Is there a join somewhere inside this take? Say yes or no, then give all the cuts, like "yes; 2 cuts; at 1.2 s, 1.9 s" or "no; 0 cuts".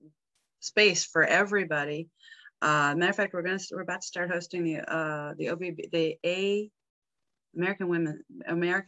no; 0 cuts